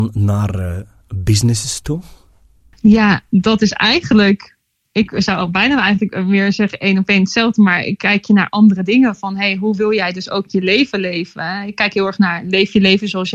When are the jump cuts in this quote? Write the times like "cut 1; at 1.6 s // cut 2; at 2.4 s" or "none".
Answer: none